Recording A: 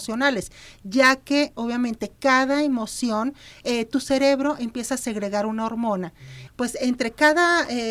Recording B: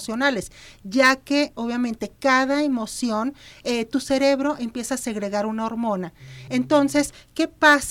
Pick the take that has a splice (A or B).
A